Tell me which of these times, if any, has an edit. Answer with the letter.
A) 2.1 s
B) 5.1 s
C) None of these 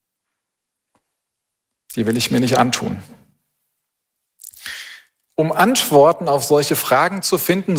C